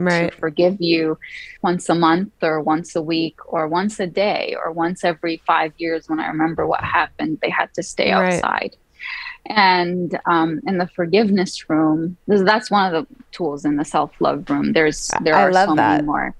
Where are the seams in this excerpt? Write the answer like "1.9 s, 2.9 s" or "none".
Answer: 1.6 s, 7.4 s

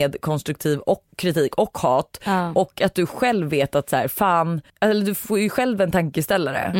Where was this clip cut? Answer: 4.7 s

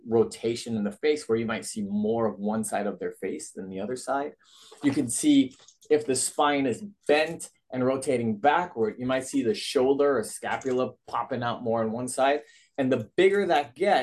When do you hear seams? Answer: none

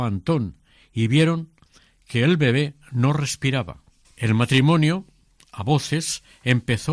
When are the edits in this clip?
4.0 s

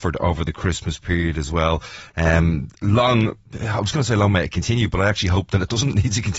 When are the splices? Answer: none

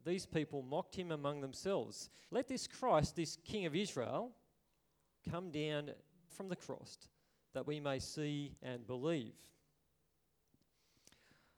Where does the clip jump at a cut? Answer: 2.3 s, 6.3 s, 8.6 s

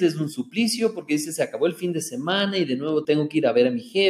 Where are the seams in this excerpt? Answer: 3.0 s

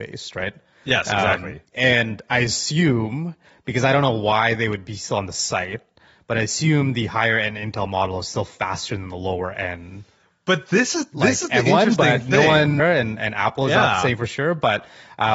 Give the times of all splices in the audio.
12.8 s

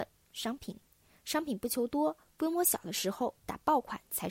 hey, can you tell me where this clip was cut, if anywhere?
none

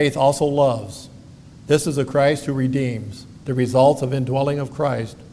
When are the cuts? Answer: 3.4 s

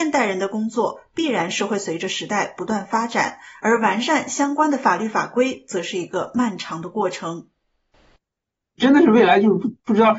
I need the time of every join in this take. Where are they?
none

